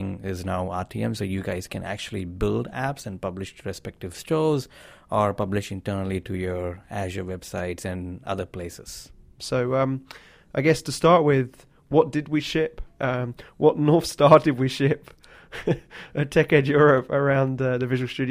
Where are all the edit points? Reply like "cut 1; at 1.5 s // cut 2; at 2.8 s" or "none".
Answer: cut 1; at 9.4 s